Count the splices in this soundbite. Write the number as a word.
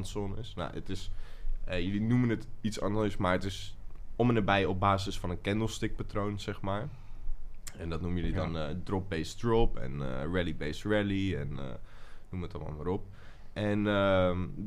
zero